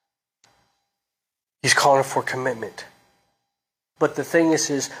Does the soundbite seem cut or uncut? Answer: cut